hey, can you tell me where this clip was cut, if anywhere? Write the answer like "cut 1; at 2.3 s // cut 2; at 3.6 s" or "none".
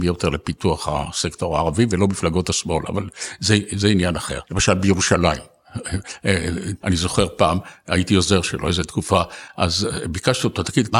cut 1; at 4.4 s // cut 2; at 6.8 s